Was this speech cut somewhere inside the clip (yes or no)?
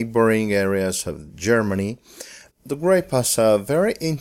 yes